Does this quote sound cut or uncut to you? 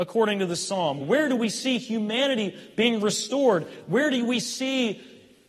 cut